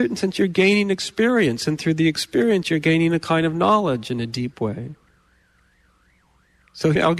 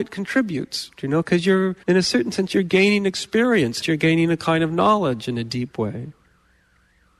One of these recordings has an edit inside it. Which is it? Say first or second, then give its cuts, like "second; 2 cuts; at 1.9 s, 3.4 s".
second; 2 cuts; at 1.8 s, 3.8 s